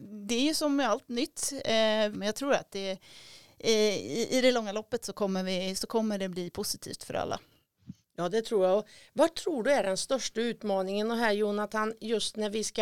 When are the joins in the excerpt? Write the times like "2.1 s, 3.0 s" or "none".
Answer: 2.1 s